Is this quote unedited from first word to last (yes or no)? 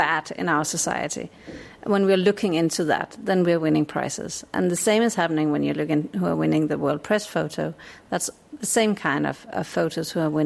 yes